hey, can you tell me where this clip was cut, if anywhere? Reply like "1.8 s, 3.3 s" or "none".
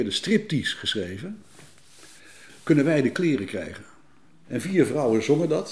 4.4 s